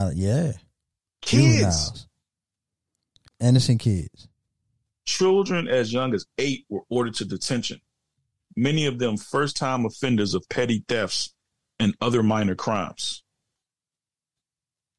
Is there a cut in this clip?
yes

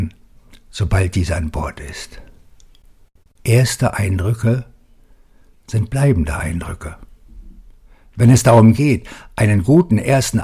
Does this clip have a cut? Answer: no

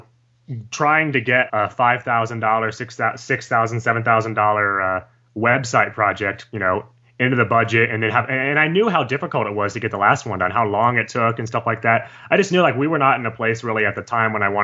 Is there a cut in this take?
yes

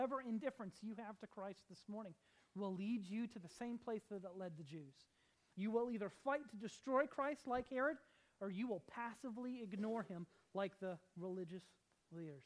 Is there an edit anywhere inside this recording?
yes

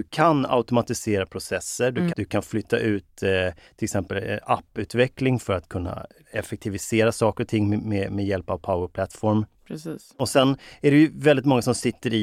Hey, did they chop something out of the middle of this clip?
yes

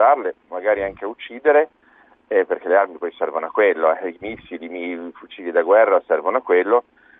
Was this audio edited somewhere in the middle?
no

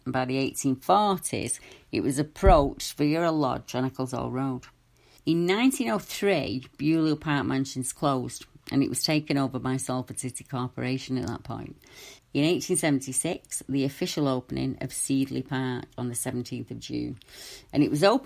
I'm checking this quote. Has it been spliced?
yes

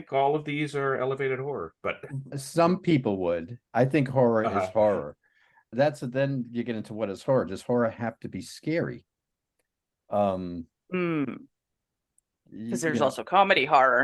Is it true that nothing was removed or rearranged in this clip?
no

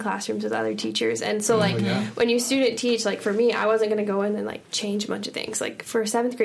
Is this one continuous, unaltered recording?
yes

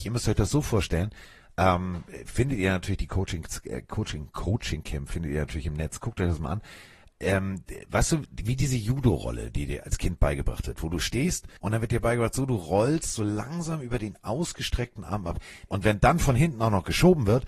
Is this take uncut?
no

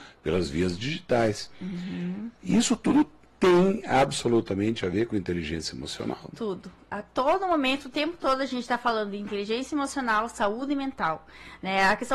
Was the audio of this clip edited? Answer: no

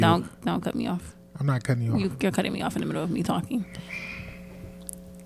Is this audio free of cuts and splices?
yes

